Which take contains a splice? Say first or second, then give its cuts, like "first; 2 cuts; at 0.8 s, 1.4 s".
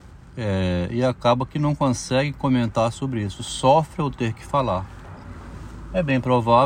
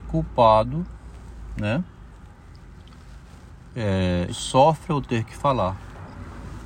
second; 1 cut; at 4.3 s